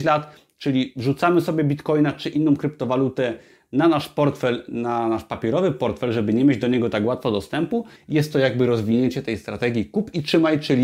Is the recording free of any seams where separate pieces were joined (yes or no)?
no